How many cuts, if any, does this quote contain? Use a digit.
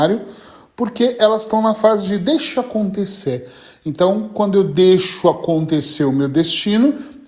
0